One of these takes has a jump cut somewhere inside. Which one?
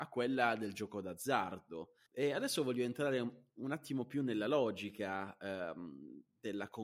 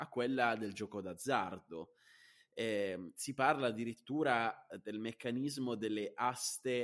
first; 1 cut; at 2.1 s

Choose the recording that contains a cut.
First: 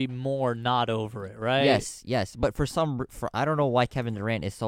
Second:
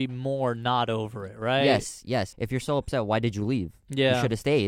second; 1 cut; at 2.3 s

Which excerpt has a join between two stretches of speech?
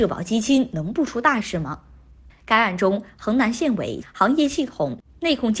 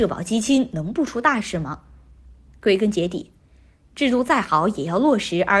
first; 2 cuts; at 2.3 s, 4.0 s

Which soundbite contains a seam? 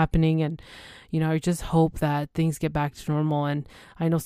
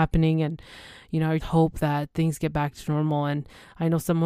second; 1 cut; at 1.4 s

